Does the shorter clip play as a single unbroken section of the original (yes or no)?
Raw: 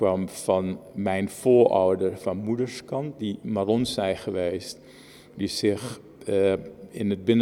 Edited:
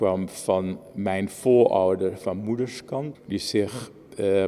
no